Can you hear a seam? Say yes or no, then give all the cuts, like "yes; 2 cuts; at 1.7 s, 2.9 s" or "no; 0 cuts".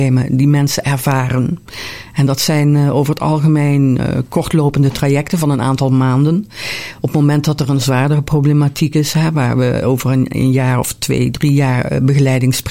no; 0 cuts